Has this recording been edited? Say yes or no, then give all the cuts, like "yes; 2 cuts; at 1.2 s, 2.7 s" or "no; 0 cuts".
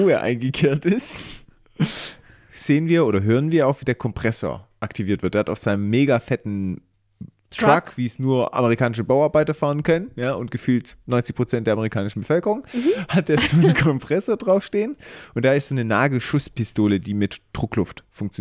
no; 0 cuts